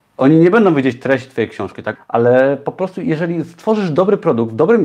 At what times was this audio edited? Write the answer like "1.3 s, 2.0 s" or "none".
2.0 s